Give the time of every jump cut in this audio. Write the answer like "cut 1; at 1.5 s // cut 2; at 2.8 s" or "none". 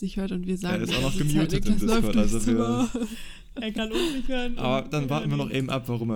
none